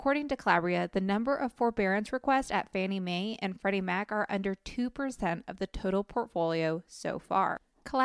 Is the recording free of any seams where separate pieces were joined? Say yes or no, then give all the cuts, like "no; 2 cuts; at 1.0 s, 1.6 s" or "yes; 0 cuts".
yes; 0 cuts